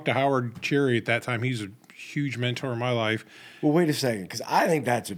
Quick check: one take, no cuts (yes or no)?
yes